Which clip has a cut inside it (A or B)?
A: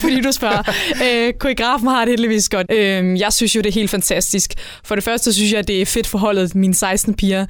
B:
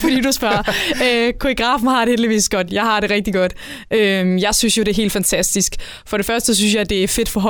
A